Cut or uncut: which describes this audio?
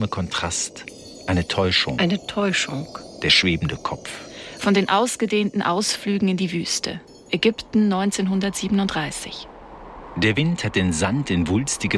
uncut